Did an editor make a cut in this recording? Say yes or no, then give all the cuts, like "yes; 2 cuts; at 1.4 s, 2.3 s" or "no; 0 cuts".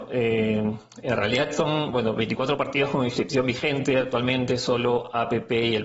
no; 0 cuts